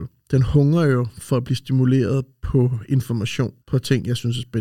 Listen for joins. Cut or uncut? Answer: cut